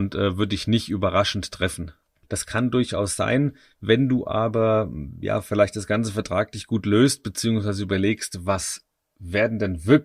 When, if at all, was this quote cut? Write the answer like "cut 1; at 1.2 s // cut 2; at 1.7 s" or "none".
cut 1; at 2.2 s

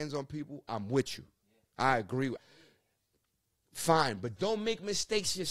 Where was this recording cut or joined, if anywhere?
cut 1; at 2.4 s // cut 2; at 4.4 s

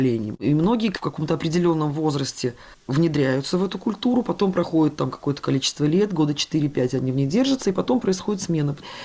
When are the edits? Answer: none

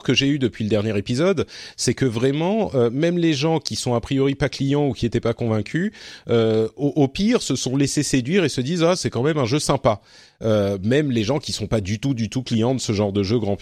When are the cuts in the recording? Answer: none

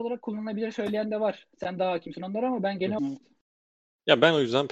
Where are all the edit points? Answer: cut 1; at 3.0 s

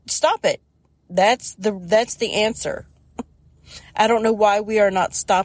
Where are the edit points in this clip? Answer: none

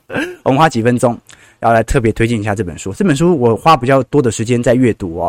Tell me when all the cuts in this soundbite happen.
none

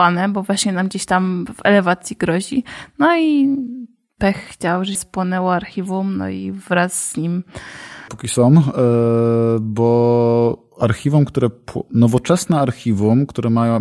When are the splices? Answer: cut 1; at 5.0 s // cut 2; at 8.1 s

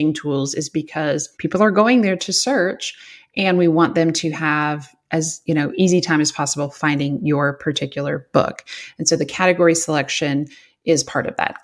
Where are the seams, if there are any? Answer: cut 1; at 1.3 s

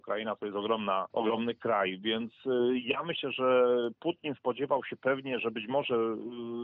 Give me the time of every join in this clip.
cut 1; at 1.1 s

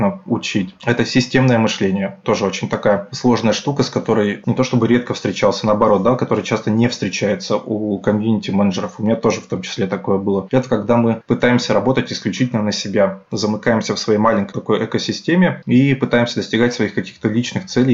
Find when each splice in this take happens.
cut 1; at 14.5 s

